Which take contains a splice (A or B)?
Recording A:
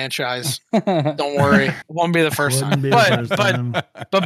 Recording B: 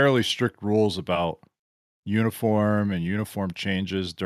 A